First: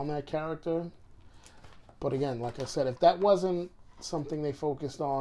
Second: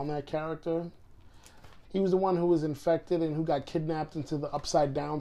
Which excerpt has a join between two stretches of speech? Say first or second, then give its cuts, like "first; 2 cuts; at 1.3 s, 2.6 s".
second; 1 cut; at 1.9 s